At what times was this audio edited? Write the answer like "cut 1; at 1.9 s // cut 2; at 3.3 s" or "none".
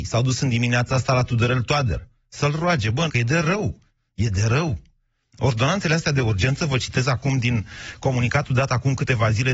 cut 1; at 3.1 s